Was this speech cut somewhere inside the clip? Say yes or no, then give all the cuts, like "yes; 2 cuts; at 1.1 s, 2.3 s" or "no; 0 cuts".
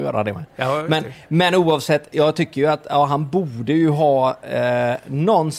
no; 0 cuts